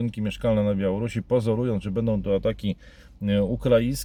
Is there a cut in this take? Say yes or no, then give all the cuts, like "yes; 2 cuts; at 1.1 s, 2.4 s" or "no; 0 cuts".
no; 0 cuts